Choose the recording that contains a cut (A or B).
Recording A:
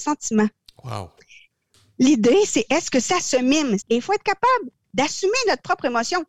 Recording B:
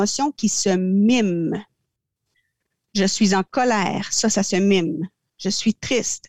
A